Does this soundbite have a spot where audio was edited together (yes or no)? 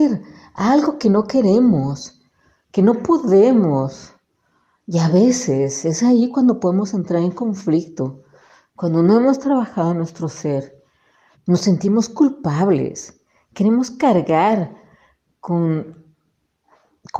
yes